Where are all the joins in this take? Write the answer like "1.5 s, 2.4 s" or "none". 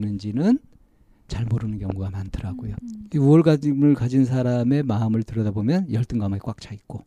2.8 s